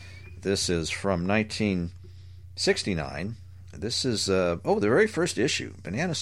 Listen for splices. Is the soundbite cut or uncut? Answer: uncut